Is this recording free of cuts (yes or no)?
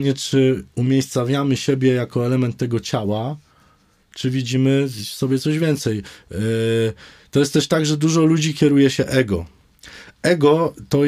yes